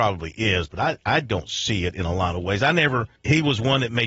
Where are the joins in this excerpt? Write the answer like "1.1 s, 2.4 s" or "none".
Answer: 3.2 s